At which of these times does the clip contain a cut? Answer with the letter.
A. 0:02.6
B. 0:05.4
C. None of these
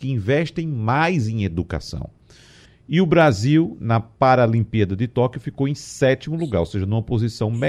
A